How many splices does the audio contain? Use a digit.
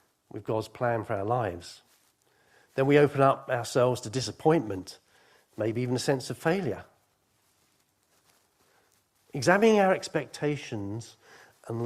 0